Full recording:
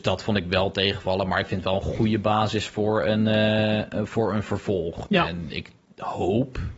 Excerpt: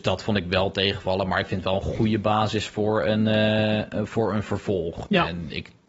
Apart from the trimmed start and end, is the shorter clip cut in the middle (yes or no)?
no